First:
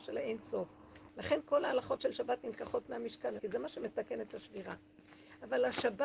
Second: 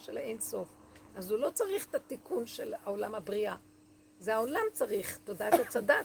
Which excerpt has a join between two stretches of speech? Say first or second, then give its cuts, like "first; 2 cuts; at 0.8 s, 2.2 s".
first; 2 cuts; at 1.1 s, 3.4 s